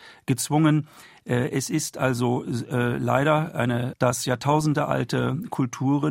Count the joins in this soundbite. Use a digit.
1